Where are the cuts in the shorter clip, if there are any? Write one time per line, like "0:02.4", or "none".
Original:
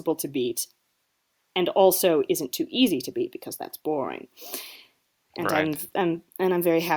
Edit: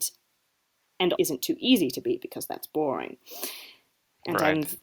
0:01.2